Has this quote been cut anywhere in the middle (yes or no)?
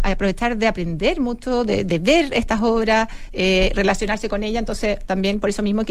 no